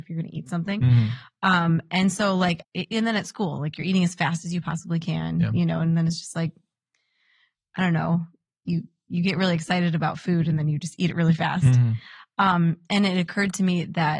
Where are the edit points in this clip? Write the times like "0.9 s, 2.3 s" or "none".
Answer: 2.6 s